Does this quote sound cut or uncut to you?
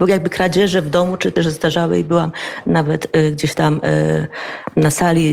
cut